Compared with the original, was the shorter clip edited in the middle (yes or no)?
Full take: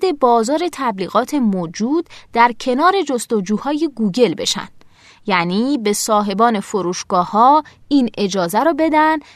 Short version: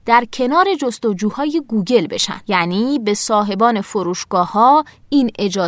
yes